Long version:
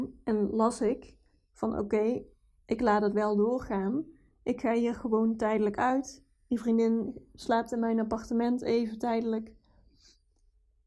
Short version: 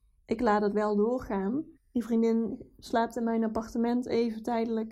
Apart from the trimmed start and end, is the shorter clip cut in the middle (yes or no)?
yes